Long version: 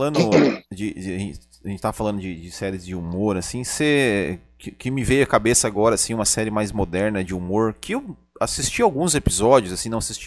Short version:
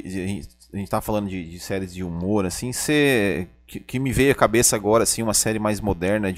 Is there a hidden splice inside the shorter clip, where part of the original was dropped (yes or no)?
no